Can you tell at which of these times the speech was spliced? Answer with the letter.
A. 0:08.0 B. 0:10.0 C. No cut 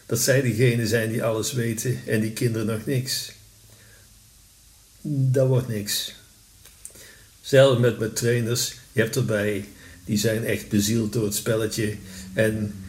A